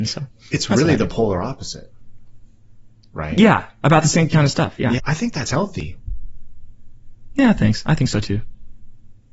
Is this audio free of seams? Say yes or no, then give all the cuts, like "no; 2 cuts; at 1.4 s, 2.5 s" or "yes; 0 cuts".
no; 1 cut; at 5.0 s